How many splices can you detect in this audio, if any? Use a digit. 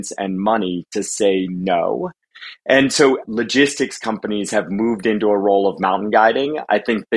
1